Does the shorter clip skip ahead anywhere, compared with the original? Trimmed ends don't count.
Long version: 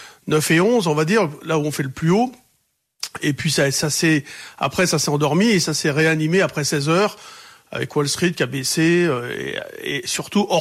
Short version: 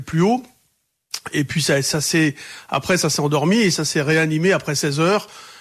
no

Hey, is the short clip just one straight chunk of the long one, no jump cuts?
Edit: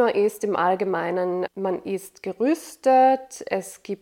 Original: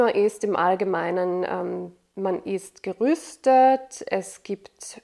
no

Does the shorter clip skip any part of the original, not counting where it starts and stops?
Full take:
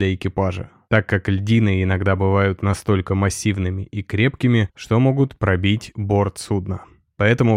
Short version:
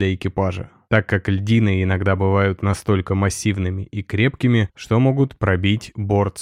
no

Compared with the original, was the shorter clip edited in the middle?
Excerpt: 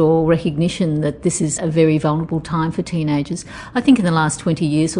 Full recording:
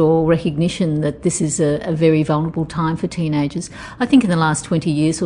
yes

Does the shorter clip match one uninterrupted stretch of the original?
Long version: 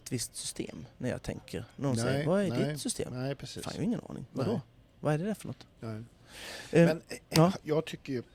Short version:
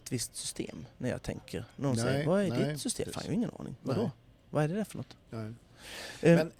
no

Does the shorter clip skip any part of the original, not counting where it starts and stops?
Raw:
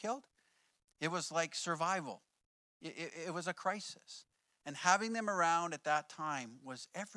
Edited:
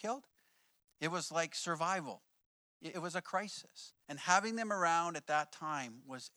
yes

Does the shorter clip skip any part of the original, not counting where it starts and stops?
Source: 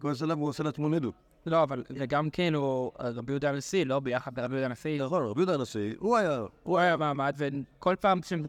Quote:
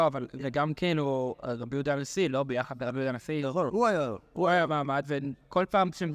yes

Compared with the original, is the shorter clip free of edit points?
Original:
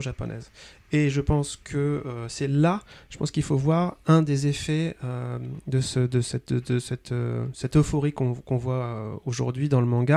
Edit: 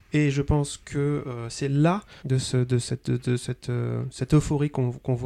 no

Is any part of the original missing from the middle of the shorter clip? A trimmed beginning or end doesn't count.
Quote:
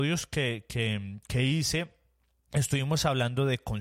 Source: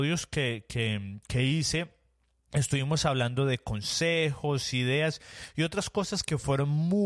no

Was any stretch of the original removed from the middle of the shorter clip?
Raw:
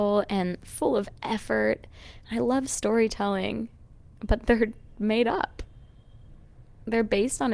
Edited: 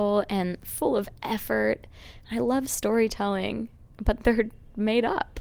yes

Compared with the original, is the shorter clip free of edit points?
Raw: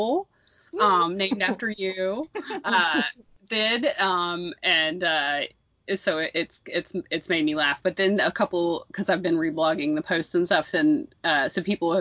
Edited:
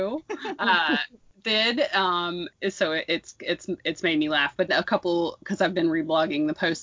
no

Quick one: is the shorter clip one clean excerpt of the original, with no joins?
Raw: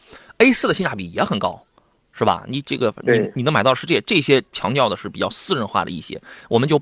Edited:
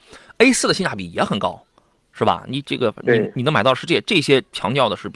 yes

